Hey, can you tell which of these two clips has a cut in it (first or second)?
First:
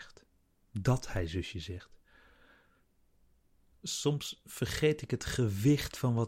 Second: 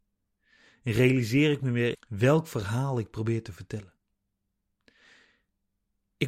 second